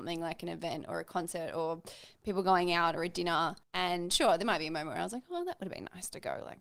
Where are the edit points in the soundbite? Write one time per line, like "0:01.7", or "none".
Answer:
0:03.6

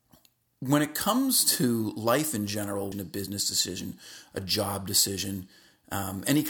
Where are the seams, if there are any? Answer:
0:02.9

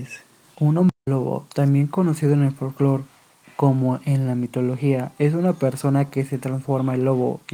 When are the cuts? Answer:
none

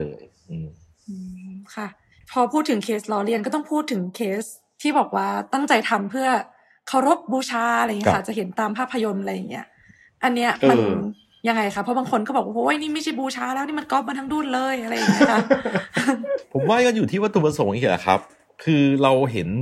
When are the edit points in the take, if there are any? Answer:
none

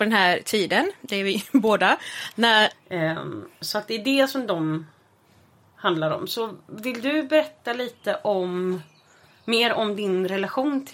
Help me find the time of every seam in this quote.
0:02.7

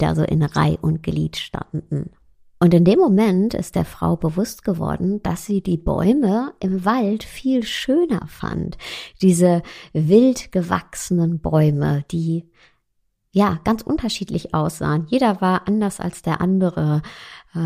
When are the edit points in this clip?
none

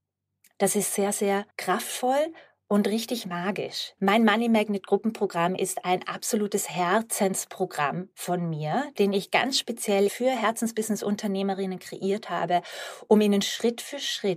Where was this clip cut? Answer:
0:01.5
0:04.0
0:10.1

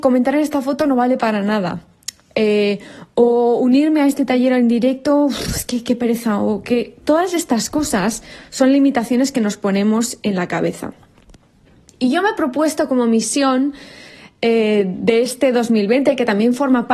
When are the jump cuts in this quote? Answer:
none

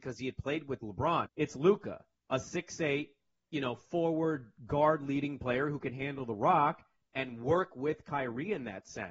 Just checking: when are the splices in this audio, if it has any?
0:01.3
0:07.0

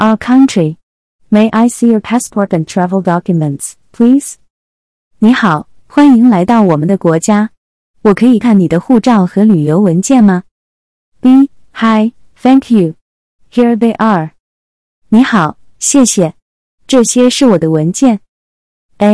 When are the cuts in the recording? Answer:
0:08.4

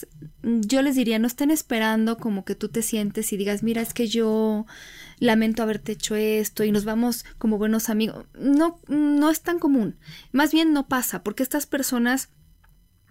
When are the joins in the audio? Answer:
none

